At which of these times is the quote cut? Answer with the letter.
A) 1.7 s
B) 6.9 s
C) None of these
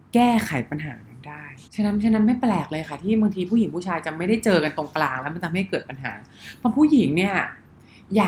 A